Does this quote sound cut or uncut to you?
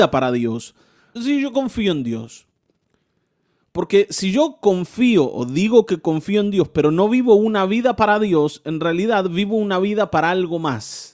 cut